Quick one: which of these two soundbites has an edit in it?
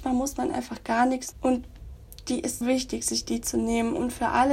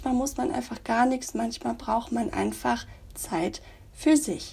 first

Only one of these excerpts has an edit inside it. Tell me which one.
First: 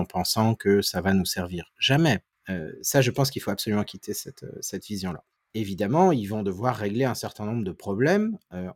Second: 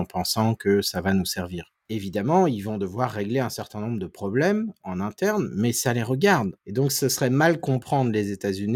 second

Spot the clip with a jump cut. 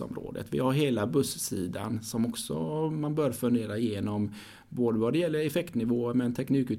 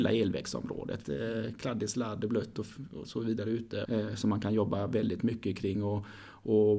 second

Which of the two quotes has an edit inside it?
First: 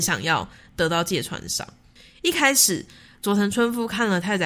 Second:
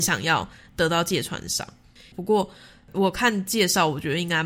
second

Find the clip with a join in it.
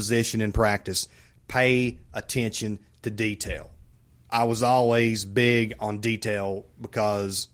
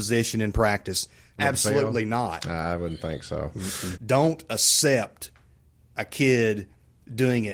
second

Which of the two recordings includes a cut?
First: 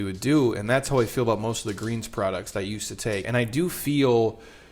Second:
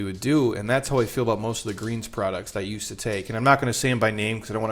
first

